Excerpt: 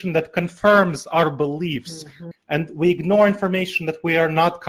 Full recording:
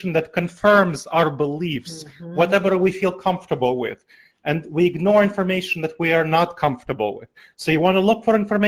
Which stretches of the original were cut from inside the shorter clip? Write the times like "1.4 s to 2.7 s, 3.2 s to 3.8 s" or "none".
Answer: 2.3 s to 4.3 s